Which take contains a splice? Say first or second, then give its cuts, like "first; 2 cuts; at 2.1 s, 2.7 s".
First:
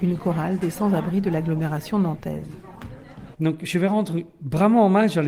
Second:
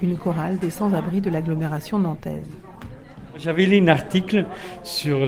first; 1 cut; at 3.3 s